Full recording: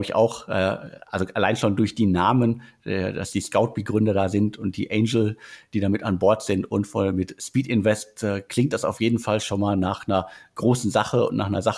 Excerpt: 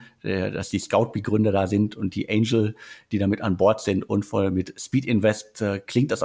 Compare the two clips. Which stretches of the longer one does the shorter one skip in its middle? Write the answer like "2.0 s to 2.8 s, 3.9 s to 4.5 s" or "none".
none